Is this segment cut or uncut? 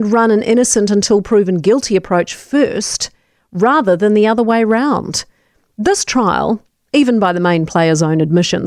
uncut